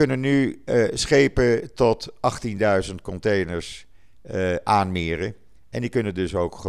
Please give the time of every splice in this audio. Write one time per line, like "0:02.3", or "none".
none